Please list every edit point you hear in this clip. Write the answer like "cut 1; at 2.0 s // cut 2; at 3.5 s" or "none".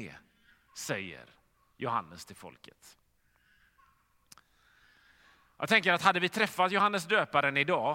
none